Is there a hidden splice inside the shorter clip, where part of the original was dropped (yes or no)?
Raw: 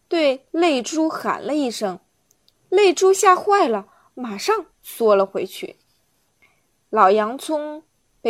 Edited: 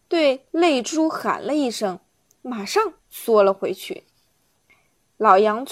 yes